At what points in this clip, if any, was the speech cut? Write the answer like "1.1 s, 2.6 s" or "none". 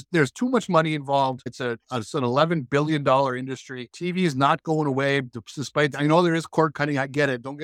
none